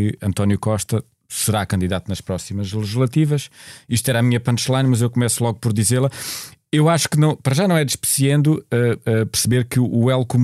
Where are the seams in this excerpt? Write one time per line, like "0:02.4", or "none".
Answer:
none